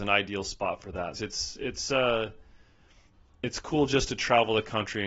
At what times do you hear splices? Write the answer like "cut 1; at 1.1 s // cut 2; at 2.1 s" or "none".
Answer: cut 1; at 1.1 s